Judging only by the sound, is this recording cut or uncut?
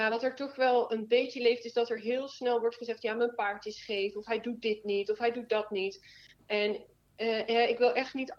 uncut